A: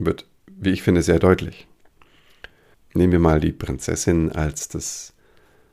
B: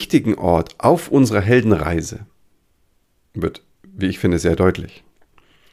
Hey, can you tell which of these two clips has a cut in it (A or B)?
A